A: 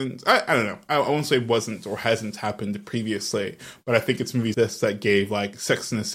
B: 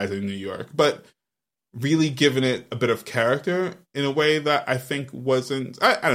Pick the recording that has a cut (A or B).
A